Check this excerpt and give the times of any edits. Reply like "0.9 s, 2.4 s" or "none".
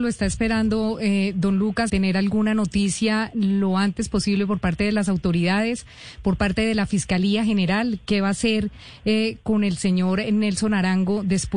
1.9 s